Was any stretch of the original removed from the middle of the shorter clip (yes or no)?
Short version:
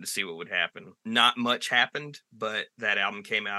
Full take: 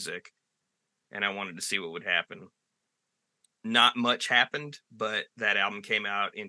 yes